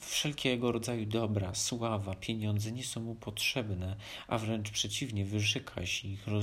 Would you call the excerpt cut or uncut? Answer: uncut